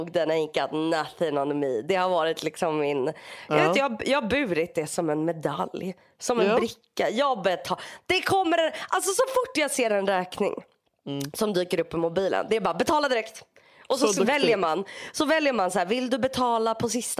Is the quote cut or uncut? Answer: uncut